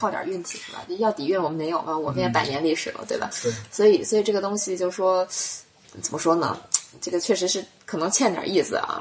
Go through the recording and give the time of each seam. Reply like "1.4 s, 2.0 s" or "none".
none